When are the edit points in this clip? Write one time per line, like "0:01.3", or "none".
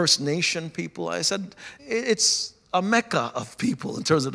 0:01.8